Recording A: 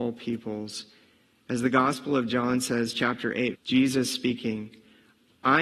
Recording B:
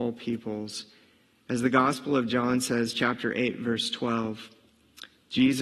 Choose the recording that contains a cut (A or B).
A